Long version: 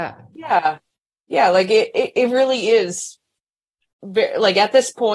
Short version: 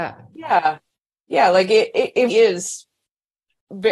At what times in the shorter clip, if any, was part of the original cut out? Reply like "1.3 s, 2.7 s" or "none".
2.3 s